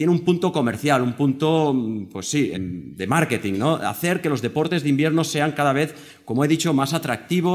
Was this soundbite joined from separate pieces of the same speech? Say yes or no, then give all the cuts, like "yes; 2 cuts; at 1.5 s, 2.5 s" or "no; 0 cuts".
yes; 1 cut; at 2.5 s